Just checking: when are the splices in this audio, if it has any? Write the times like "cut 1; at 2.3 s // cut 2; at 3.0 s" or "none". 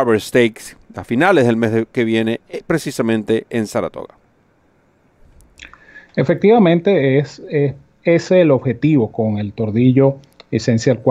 none

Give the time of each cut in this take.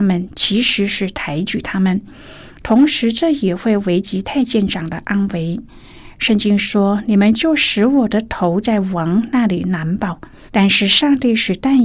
cut 1; at 10.5 s

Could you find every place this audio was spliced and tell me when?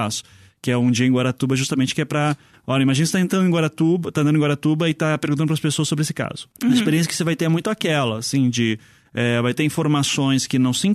cut 1; at 6.5 s

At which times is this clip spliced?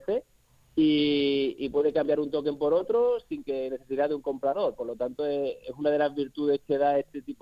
none

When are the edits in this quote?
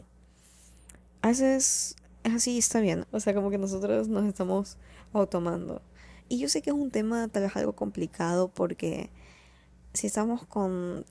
cut 1; at 3.0 s // cut 2; at 6.2 s

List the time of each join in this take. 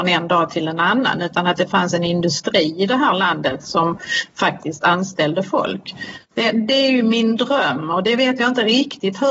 none

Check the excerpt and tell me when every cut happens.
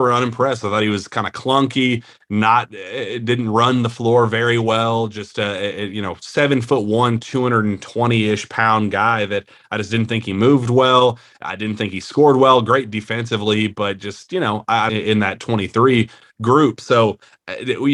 cut 1; at 14.9 s

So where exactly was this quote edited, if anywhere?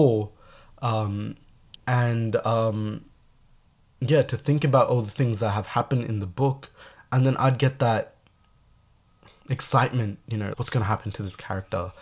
cut 1; at 1.8 s // cut 2; at 10.5 s

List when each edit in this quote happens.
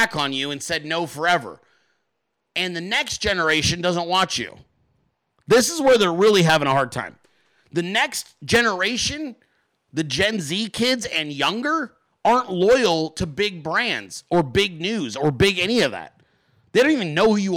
none

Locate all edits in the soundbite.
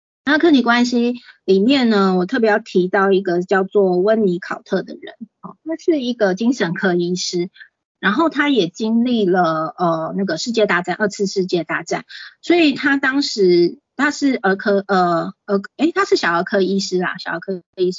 cut 1; at 5.6 s

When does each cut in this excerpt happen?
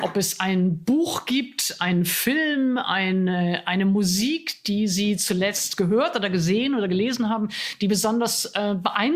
none

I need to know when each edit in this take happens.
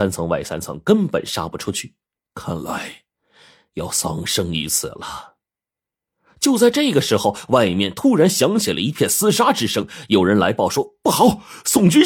cut 1; at 2.2 s

